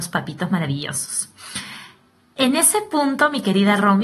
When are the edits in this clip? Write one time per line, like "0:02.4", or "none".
none